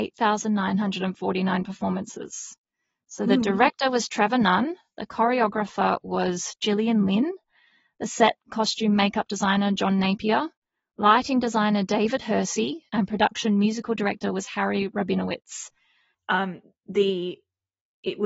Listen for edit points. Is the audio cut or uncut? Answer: cut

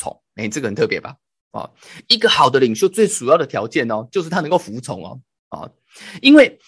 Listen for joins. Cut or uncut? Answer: uncut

